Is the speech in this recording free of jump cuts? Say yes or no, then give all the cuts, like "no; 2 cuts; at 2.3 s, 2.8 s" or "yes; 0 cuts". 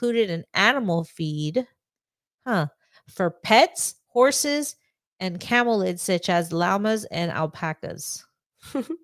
yes; 0 cuts